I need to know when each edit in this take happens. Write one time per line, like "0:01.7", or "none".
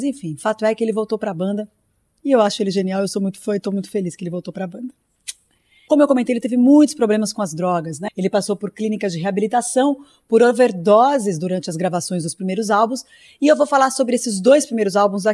0:05.9
0:08.1